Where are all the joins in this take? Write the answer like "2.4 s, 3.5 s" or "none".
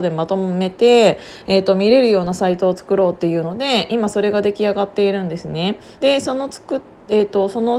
6.0 s